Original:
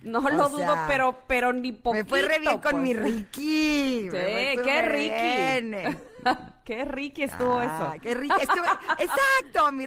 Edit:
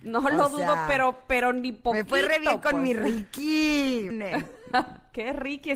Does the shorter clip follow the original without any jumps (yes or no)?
no